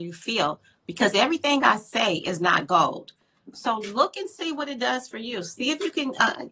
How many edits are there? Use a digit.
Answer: 1